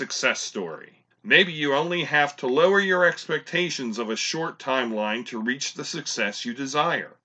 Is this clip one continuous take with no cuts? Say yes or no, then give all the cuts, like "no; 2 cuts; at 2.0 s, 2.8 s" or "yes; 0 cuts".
no; 1 cut; at 1.1 s